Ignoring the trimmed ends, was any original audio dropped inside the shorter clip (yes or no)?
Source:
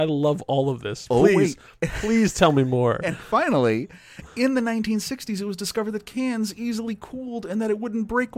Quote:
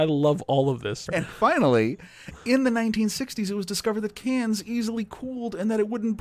yes